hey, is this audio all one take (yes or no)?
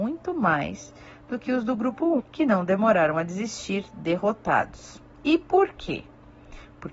no